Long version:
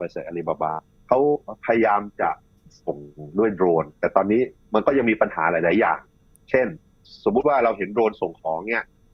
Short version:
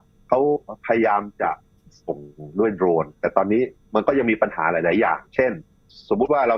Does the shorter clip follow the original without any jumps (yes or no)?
no